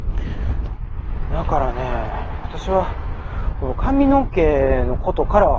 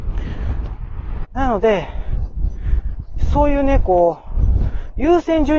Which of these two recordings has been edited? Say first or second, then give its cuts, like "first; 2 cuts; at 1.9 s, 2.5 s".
second; 1 cut; at 1.2 s